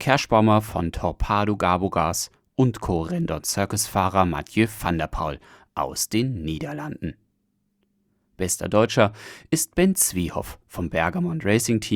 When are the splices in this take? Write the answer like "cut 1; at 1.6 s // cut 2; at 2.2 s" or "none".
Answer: none